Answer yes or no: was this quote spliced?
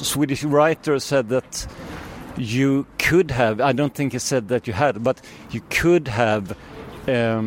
no